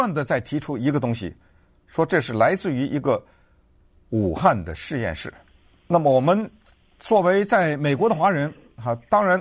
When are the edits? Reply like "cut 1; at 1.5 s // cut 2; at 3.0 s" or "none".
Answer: cut 1; at 5.7 s